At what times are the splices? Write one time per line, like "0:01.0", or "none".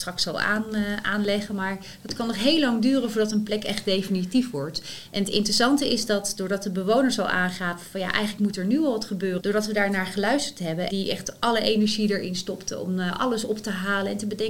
0:09.4
0:10.9